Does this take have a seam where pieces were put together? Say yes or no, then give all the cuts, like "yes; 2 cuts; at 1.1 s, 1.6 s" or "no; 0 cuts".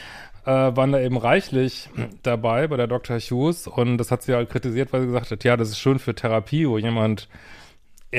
no; 0 cuts